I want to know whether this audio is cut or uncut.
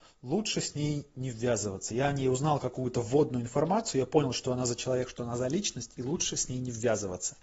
uncut